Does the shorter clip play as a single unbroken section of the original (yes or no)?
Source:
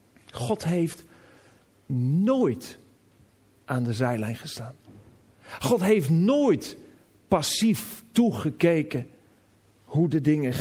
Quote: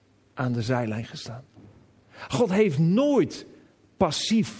yes